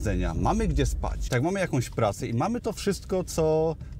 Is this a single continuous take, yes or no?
no